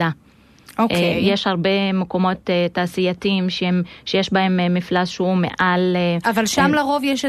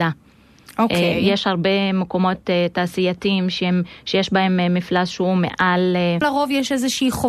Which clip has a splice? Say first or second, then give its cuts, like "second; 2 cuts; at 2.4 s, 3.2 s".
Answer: second; 1 cut; at 6.2 s